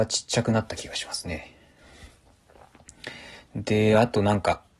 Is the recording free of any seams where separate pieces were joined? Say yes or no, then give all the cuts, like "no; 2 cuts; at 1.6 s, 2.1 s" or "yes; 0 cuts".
yes; 0 cuts